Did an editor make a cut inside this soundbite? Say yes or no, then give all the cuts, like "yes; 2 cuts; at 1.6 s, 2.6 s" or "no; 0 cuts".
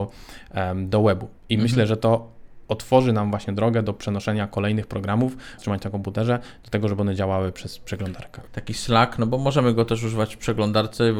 yes; 2 cuts; at 5.6 s, 8.5 s